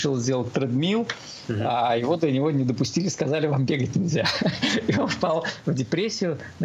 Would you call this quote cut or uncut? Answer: uncut